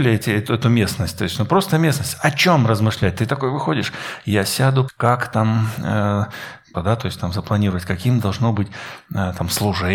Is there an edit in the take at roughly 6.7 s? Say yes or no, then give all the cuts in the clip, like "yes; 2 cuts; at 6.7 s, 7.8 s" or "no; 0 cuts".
yes; 2 cuts; at 4.9 s, 6.7 s